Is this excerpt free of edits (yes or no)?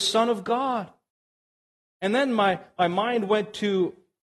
yes